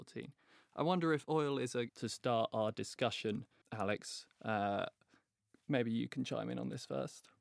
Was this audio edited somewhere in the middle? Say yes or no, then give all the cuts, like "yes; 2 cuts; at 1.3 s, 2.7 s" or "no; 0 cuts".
yes; 2 cuts; at 1.9 s, 3.6 s